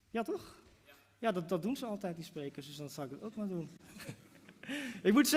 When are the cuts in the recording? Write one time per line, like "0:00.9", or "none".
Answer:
none